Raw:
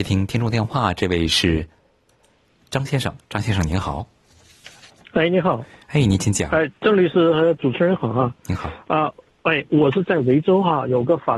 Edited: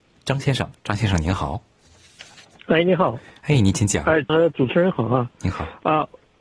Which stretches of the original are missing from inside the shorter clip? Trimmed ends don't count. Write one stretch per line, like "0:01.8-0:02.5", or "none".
0:06.8-0:07.3